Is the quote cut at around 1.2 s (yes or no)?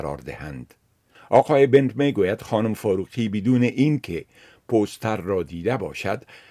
yes